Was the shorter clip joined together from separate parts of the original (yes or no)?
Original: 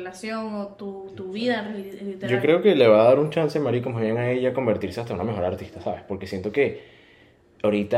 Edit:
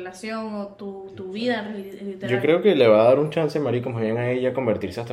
no